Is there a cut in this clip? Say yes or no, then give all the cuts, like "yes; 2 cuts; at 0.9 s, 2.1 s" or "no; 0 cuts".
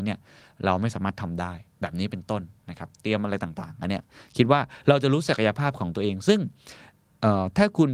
no; 0 cuts